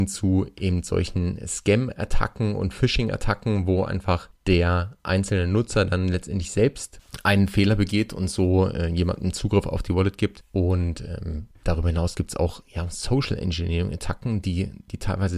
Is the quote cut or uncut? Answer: uncut